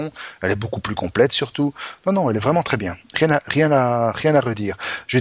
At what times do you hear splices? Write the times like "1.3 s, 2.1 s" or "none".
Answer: none